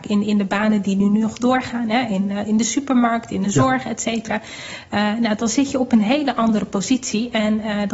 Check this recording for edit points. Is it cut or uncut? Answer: uncut